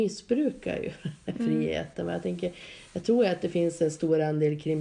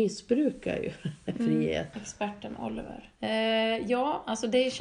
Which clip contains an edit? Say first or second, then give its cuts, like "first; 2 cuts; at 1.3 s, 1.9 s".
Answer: second; 2 cuts; at 1.9 s, 3.2 s